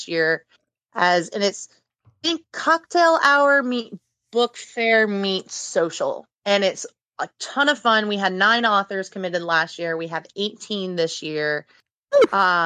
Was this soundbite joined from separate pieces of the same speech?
yes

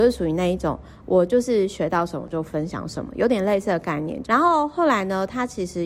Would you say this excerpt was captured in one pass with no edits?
no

